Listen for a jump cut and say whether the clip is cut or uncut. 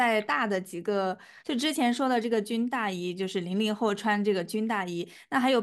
cut